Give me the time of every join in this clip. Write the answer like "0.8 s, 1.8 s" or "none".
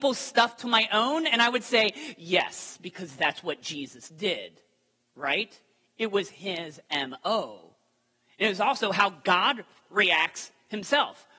none